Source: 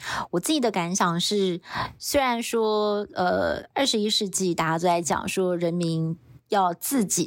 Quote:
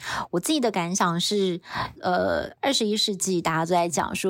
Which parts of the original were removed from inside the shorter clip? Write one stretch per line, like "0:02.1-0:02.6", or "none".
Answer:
0:01.9-0:03.1